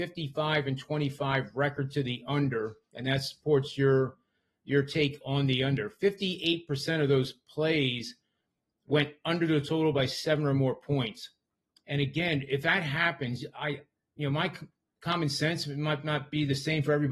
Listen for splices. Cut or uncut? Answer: uncut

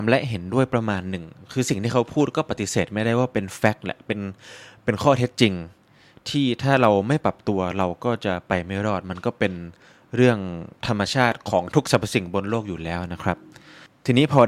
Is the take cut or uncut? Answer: uncut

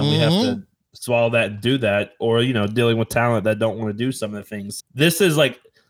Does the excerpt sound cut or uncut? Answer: cut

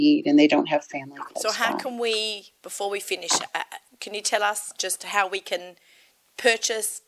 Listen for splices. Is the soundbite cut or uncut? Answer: uncut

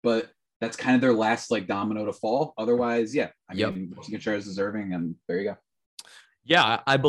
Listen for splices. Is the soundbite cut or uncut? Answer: uncut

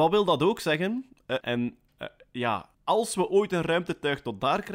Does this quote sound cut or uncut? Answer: cut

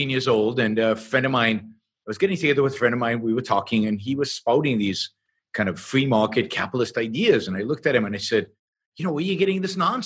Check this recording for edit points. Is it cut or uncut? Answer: uncut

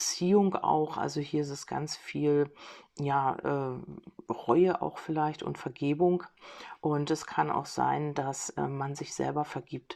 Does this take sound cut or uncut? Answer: uncut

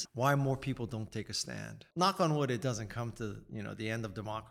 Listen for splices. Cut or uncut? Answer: cut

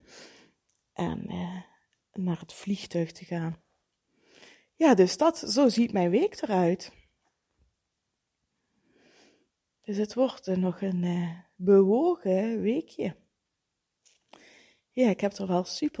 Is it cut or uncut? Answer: uncut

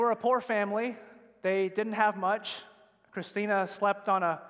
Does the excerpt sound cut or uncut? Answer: uncut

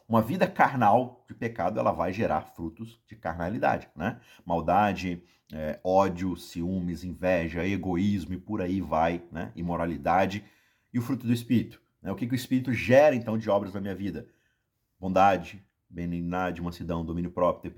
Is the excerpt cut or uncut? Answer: uncut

